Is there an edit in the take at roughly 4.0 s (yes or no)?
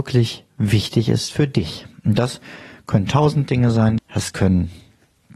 yes